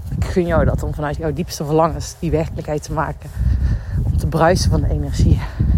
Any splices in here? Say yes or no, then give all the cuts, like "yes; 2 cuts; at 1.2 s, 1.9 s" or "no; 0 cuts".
yes; 1 cut; at 1.2 s